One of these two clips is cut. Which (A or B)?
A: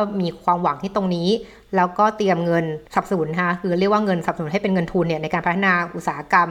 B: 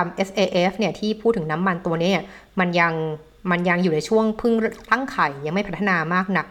A